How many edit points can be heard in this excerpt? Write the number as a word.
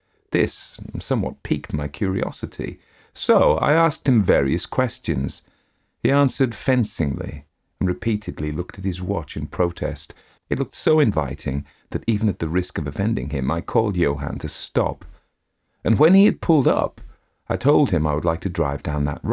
one